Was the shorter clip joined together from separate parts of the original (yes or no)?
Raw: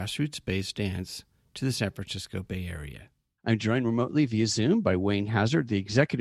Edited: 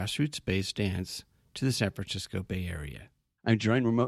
no